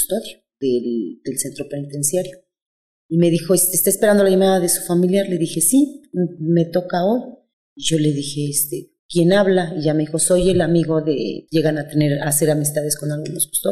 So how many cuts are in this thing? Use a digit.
3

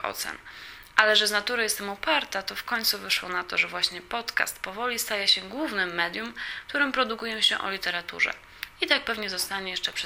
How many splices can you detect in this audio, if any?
0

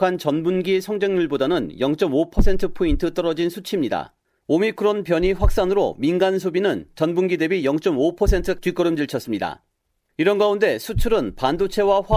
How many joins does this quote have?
0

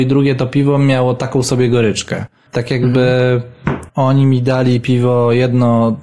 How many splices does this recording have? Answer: 1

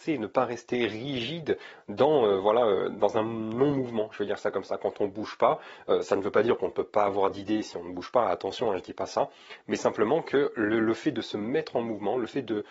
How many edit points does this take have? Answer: 0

